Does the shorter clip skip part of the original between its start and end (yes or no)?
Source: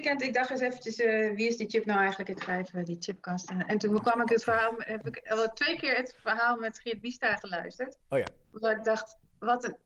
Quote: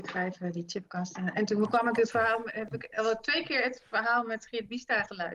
no